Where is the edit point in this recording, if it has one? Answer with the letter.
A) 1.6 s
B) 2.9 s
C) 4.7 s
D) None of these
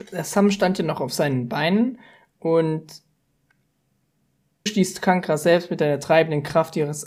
C